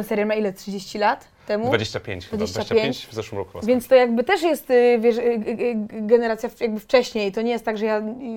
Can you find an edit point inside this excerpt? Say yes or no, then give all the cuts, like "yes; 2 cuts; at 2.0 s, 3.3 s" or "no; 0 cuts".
no; 0 cuts